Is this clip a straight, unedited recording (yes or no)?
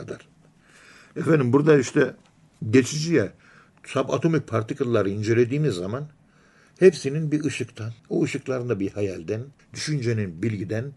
no